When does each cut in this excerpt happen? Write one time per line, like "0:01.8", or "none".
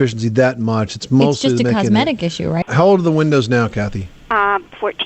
0:02.6

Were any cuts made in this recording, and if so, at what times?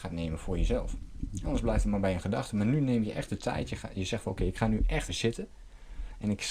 0:05.1

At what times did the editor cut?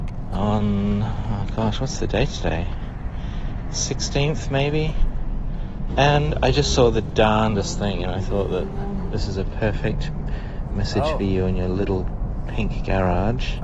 0:05.9

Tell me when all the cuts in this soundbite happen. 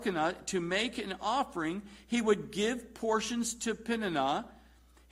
none

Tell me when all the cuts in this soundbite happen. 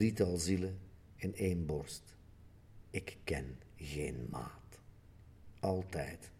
0:02.8

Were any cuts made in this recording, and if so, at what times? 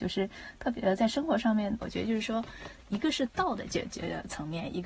0:01.8

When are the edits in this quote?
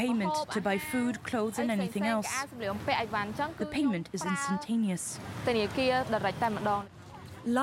none

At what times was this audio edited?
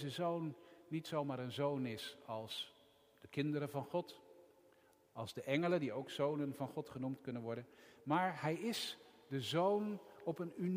none

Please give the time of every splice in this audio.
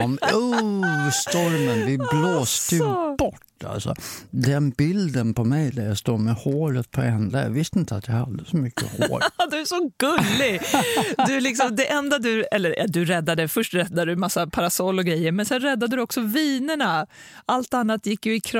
none

